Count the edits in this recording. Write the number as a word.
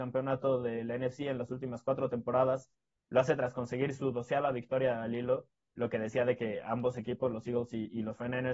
zero